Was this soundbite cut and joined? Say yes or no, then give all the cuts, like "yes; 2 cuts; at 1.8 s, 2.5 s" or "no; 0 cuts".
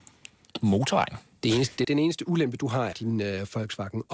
yes; 2 cuts; at 1.8 s, 2.9 s